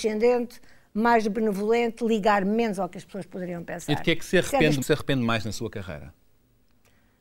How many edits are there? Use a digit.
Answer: 1